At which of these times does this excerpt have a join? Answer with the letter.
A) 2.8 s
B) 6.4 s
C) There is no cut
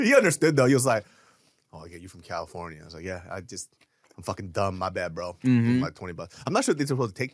C